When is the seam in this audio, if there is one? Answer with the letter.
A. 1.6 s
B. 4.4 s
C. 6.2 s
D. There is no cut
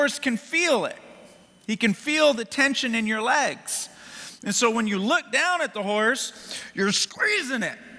D